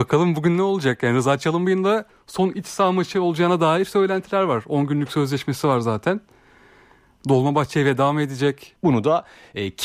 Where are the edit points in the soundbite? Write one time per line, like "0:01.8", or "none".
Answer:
0:08.8